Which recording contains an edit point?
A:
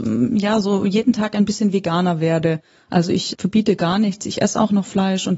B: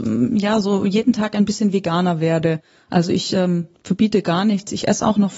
A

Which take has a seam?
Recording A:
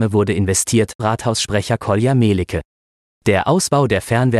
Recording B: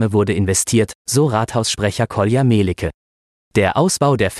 A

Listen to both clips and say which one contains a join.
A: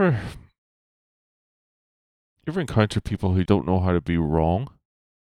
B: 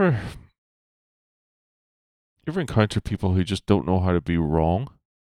A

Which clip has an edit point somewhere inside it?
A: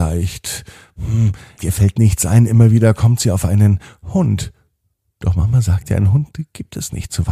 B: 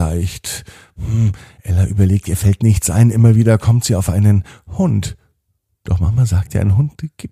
A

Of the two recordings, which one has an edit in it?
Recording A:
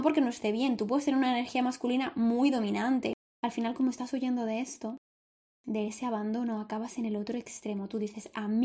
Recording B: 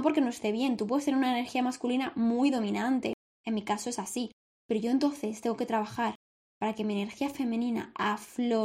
A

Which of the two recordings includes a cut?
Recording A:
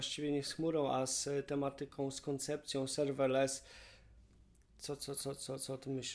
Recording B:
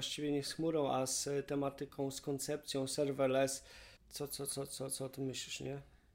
B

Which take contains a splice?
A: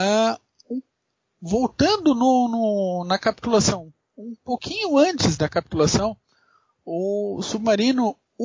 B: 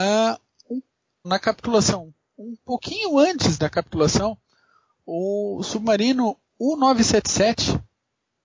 B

